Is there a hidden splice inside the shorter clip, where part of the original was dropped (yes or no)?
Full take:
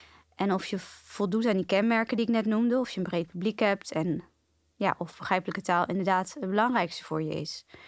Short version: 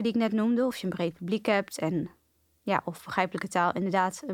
no